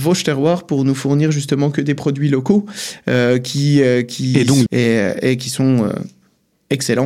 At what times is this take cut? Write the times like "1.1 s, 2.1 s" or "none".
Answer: 4.7 s